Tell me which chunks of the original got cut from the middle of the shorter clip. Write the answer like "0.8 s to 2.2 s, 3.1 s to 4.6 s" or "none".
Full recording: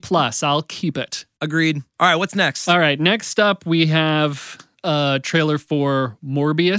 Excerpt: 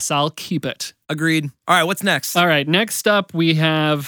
none

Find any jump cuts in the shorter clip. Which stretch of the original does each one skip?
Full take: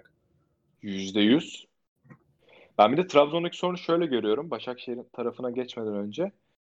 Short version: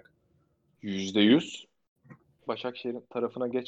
2.5 s to 4.5 s

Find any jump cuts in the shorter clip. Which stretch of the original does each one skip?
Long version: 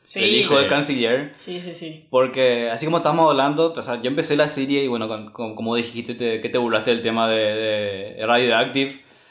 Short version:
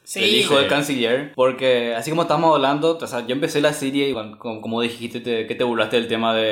1.3 s to 2.1 s, 4.9 s to 5.1 s

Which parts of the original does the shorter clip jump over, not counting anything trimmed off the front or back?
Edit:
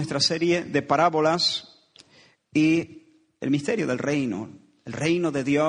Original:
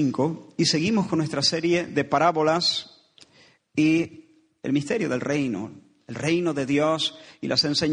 none

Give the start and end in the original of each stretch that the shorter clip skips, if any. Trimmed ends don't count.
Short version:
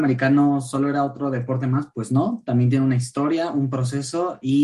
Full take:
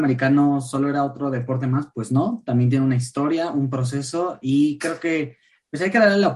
none

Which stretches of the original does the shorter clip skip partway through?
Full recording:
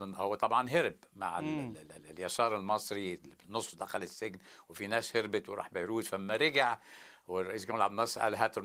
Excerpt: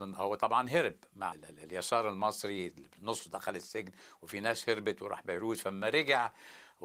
1.3 s to 1.8 s

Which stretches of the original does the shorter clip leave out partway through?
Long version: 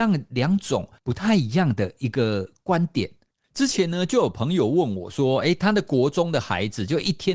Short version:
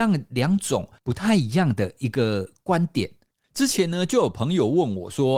none

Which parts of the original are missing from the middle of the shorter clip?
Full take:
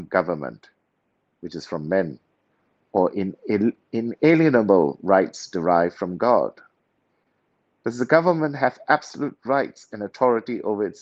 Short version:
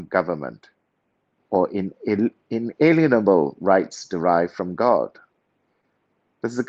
1.4 s to 2.8 s

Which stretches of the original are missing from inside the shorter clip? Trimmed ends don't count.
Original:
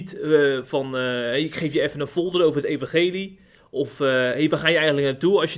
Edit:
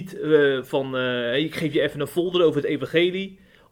none

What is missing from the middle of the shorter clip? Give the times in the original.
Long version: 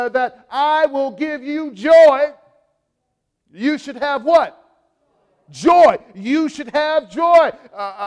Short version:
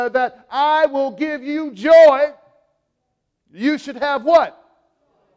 none

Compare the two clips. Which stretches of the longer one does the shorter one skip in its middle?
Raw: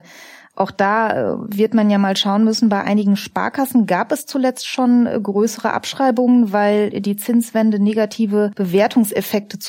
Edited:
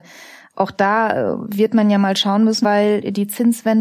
2.6 s to 6.5 s

